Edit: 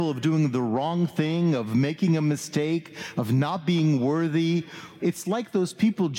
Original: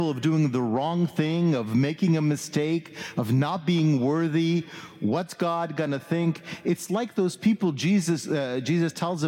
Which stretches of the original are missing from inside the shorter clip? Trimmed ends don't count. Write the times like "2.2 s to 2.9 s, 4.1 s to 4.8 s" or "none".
5.0 s to 6.6 s